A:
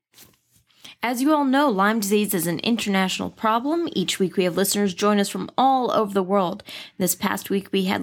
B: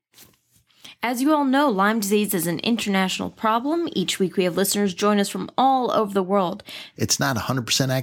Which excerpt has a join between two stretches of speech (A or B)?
B